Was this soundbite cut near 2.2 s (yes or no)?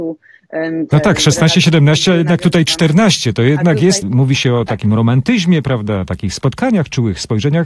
no